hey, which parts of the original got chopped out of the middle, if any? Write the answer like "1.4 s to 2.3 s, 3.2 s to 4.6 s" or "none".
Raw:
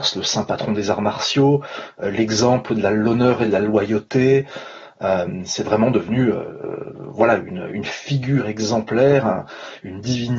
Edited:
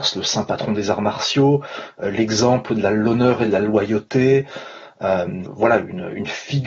5.5 s to 7.0 s